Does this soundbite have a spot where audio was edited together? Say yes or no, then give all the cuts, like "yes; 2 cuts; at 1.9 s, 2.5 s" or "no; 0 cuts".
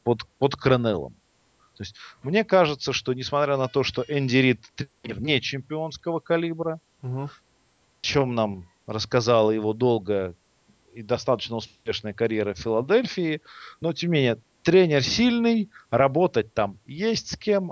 no; 0 cuts